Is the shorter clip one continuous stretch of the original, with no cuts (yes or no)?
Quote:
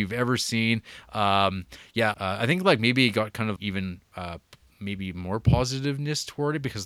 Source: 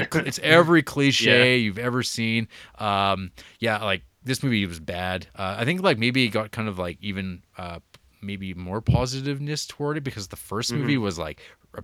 no